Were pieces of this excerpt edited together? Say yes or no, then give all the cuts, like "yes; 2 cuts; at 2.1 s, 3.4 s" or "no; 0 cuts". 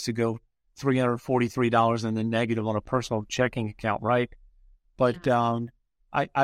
no; 0 cuts